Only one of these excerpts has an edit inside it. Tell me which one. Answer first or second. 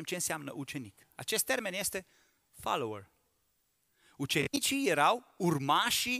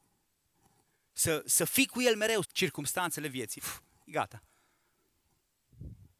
second